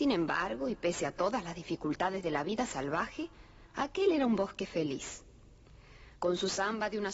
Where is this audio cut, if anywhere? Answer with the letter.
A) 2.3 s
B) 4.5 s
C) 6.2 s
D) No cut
C